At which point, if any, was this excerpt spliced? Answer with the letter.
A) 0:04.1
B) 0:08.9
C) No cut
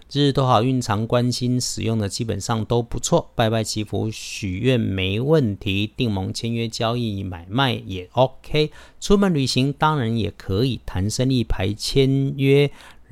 C